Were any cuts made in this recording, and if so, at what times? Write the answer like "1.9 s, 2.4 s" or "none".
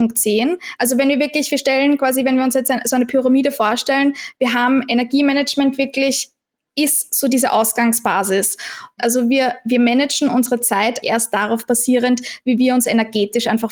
9.0 s, 11.0 s